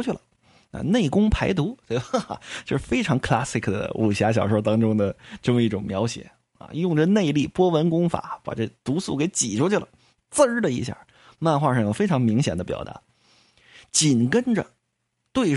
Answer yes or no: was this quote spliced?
no